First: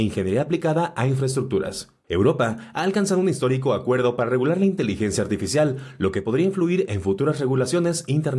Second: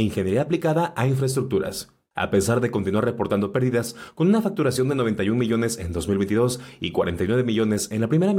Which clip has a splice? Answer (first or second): first